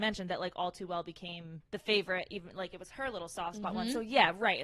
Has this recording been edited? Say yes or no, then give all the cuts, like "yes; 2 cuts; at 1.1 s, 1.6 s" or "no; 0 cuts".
yes; 1 cut; at 1.6 s